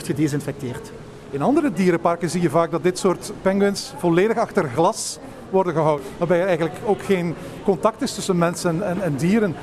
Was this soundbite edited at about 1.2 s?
no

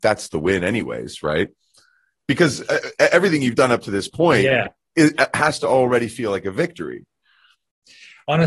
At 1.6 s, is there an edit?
no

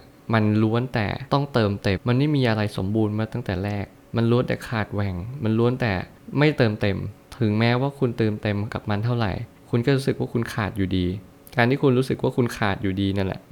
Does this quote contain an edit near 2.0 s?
yes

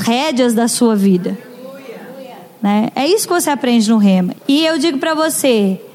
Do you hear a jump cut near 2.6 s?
no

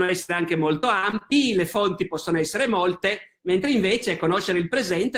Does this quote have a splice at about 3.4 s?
yes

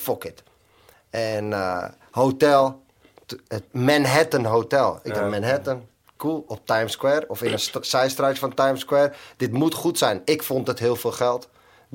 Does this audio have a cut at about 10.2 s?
no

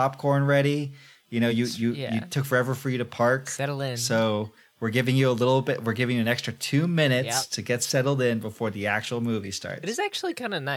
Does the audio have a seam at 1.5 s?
no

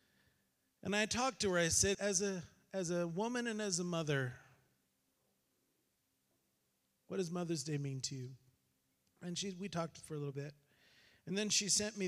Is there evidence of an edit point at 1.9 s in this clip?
yes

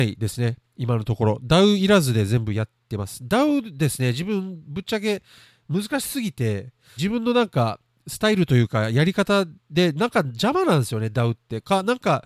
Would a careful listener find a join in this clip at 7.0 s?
yes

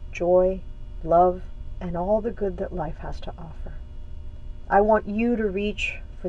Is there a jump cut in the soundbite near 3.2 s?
no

